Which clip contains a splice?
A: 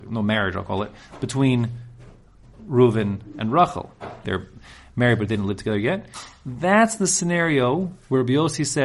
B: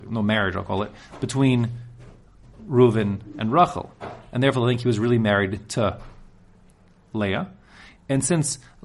A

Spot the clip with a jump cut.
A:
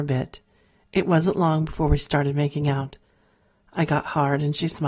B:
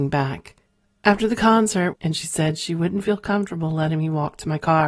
B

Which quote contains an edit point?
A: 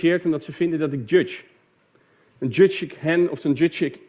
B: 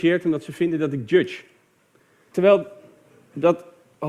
B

